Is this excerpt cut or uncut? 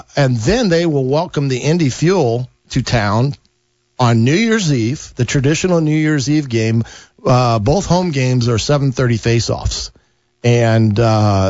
uncut